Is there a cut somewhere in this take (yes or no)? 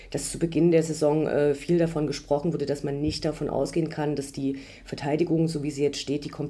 no